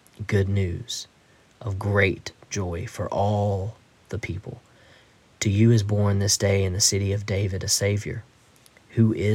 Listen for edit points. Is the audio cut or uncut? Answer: uncut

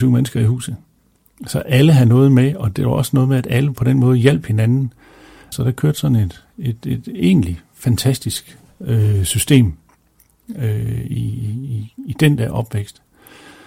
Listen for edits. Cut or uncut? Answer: cut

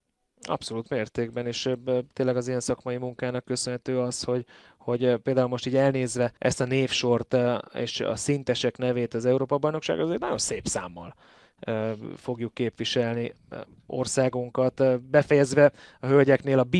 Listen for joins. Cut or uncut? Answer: cut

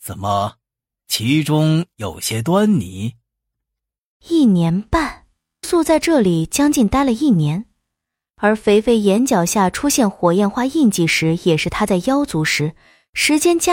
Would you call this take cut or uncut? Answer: cut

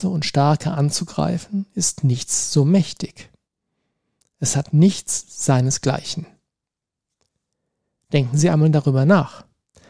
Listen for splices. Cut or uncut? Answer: uncut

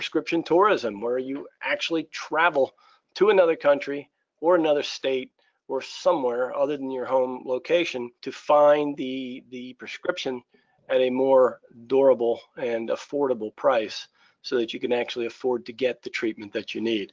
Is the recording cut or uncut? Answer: cut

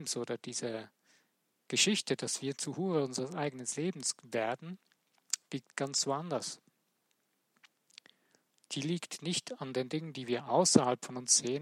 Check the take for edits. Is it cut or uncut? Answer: uncut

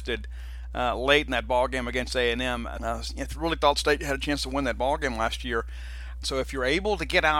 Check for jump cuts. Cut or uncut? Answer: cut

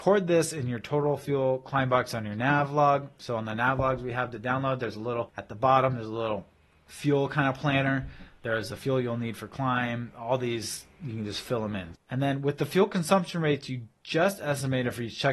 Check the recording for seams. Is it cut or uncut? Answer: cut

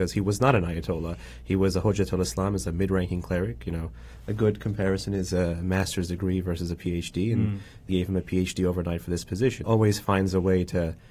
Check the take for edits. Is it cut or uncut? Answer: cut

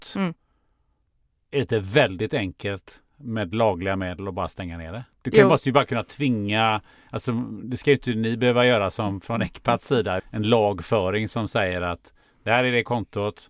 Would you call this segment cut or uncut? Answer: cut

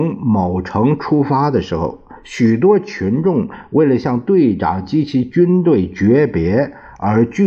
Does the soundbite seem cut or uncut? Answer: uncut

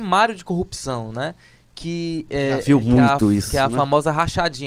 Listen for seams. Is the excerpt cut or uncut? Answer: uncut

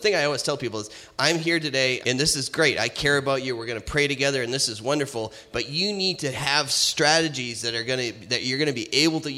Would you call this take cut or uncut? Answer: cut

